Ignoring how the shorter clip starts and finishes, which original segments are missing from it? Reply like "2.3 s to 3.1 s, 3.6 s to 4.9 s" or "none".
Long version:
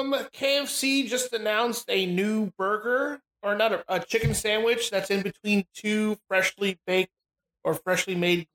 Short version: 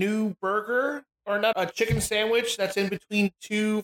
3.7 s to 3.9 s